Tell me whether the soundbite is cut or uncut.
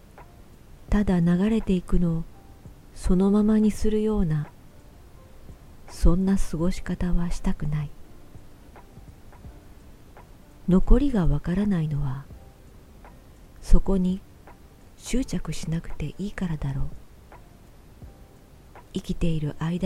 uncut